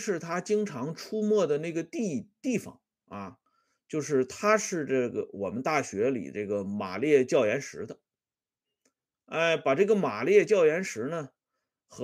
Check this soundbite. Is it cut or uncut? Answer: uncut